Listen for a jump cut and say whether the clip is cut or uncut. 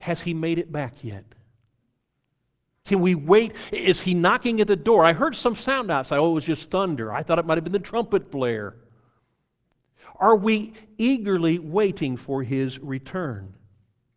uncut